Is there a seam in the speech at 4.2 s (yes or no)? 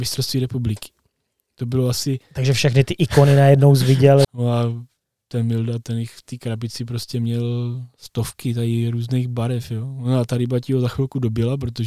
yes